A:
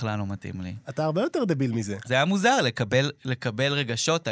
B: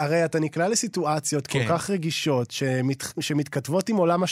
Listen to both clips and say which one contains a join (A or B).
A